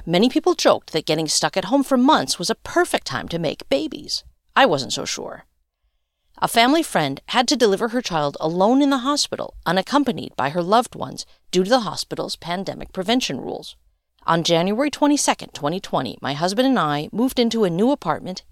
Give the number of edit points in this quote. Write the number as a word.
one